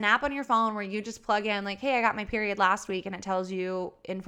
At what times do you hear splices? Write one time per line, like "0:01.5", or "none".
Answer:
none